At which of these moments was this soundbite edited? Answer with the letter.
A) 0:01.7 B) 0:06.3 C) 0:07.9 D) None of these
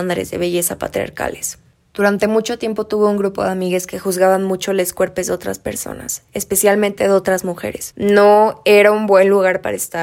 A